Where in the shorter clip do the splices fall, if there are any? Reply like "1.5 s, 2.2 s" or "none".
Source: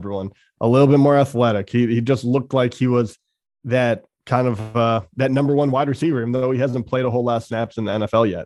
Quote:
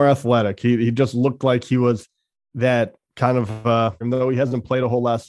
4.0 s